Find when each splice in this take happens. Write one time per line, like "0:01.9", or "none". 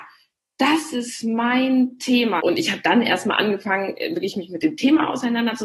0:02.4